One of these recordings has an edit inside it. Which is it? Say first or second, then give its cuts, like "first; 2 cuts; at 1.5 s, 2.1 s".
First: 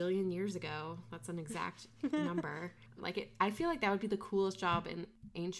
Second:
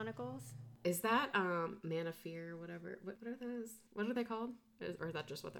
first; 1 cut; at 3.0 s